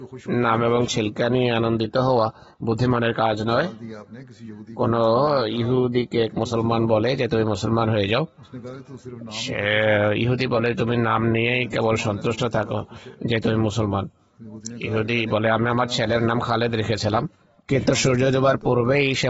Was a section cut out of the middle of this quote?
no; 0 cuts

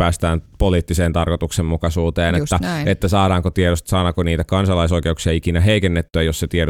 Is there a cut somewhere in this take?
no; 0 cuts

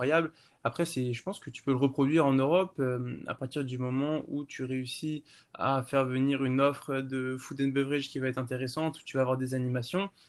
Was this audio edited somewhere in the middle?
no; 0 cuts

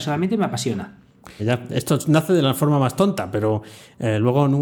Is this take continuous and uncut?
no; 1 cut; at 1.4 s

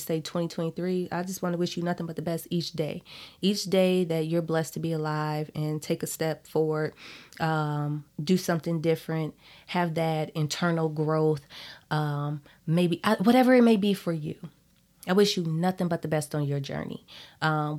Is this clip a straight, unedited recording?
yes; 0 cuts

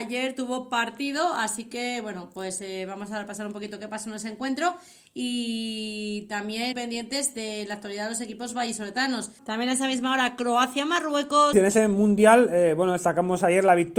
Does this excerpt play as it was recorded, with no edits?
no; 3 cuts; at 6.7 s, 9.4 s, 11.5 s

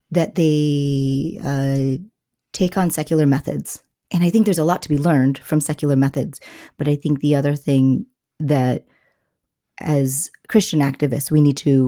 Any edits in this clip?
no; 0 cuts

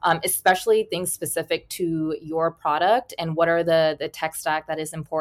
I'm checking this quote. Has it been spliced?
no; 0 cuts

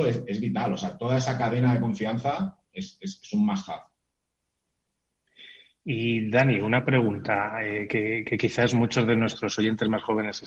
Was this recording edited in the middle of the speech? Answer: no; 0 cuts

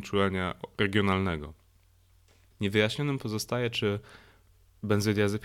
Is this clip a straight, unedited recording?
no; 1 cut; at 2.5 s

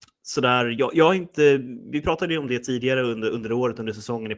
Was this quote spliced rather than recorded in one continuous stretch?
no; 0 cuts

